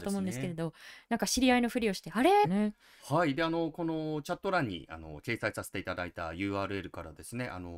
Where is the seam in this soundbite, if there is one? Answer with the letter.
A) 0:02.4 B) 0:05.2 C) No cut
A